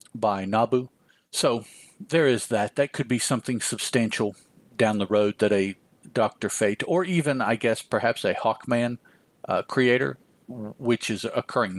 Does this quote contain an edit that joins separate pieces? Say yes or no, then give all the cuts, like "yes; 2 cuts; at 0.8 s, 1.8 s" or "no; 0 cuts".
no; 0 cuts